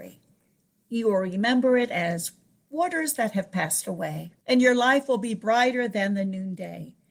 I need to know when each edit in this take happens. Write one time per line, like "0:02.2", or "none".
0:04.4